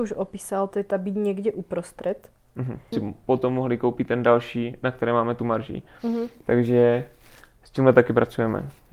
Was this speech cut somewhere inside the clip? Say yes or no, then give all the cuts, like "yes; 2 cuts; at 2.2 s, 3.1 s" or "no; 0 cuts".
yes; 1 cut; at 2.9 s